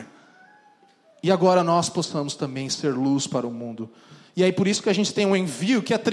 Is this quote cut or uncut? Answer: uncut